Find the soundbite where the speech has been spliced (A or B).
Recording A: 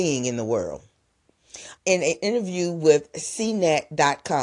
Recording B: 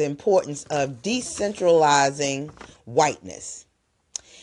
A